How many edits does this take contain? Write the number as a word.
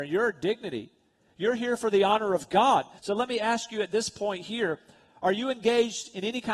one